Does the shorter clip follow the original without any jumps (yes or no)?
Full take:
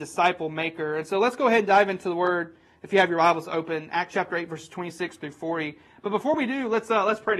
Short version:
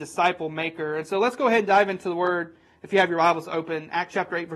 yes